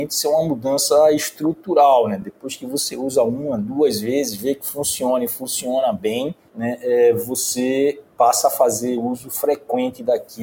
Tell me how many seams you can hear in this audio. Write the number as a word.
zero